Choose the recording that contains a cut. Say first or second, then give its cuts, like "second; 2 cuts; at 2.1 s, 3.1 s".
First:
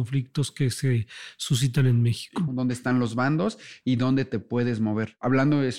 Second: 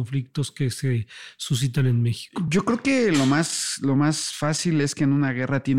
first; 1 cut; at 2.5 s